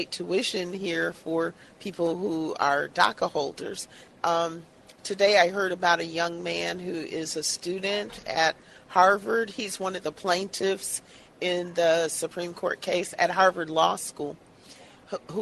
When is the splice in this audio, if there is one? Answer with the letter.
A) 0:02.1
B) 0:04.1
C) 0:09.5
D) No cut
B